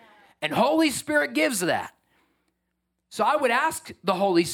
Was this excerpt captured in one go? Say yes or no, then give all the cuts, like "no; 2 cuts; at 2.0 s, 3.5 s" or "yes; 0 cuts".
yes; 0 cuts